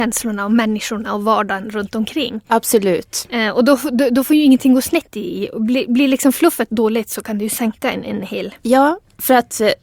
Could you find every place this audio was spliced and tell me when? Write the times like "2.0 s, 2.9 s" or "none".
none